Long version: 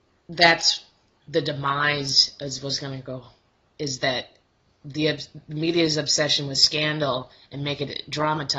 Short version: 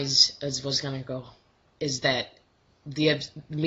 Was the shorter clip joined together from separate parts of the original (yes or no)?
no